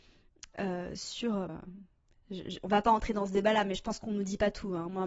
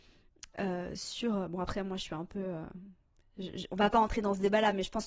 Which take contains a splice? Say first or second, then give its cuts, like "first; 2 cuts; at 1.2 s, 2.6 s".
first; 1 cut; at 1.5 s